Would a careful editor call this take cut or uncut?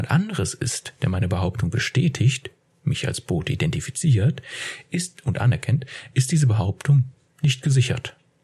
uncut